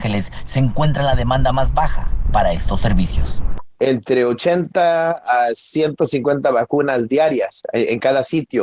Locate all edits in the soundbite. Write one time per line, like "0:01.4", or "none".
none